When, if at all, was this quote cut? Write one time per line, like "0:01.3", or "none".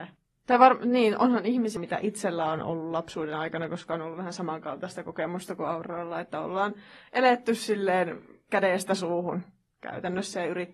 0:01.8